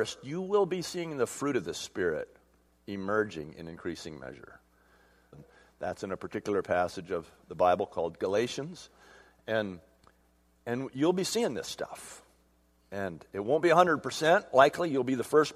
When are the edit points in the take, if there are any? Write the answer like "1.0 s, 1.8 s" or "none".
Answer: 5.3 s